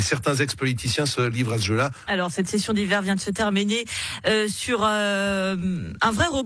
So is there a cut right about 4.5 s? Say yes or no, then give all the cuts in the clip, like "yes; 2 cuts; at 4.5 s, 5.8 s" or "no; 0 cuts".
no; 1 cut; at 2.1 s